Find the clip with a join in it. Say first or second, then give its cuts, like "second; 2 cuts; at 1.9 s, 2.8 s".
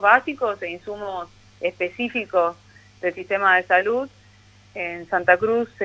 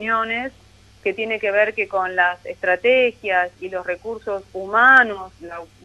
first; 1 cut; at 4.7 s